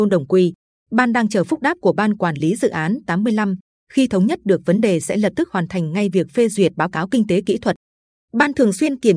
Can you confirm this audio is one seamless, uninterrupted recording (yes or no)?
yes